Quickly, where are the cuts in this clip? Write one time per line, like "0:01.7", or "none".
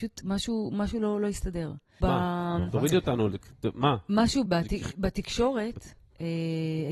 0:02.0
0:04.5